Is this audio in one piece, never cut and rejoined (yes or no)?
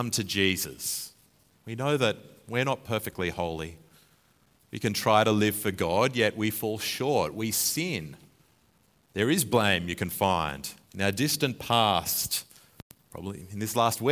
no